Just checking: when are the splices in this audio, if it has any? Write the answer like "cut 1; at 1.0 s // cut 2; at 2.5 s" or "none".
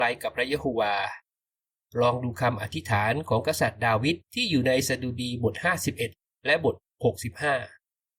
cut 1; at 4.2 s